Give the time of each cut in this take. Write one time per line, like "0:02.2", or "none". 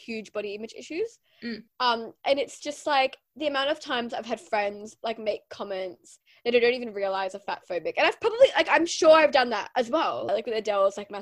0:01.7
0:10.3